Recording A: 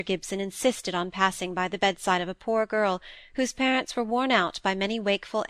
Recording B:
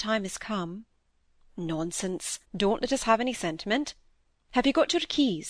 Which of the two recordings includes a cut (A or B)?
B